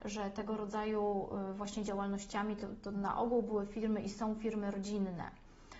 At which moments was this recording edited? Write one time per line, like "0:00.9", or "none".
none